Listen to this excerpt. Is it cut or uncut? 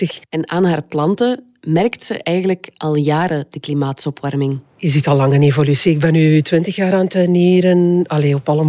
uncut